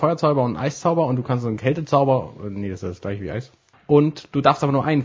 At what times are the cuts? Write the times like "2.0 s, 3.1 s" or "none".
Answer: 3.7 s